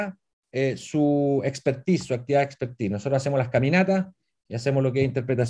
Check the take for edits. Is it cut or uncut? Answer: uncut